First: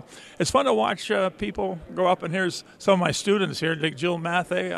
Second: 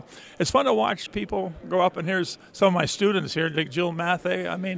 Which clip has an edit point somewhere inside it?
second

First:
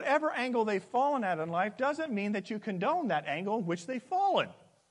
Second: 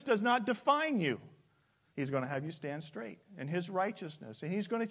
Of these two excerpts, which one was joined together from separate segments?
second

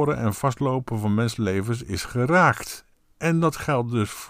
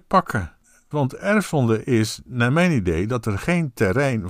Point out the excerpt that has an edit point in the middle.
second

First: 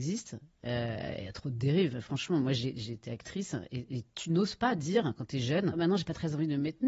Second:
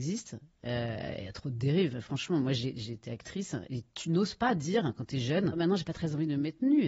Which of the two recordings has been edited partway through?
second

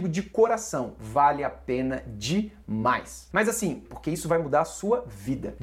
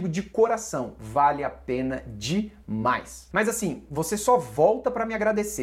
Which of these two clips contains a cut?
first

